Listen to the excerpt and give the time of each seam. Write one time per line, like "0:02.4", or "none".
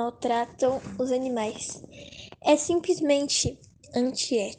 none